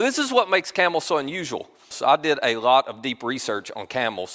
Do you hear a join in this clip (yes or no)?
yes